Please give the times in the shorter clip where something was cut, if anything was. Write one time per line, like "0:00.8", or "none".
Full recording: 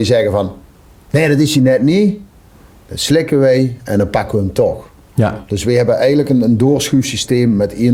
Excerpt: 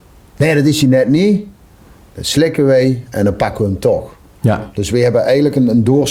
none